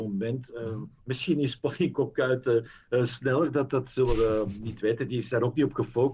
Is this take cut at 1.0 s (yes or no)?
yes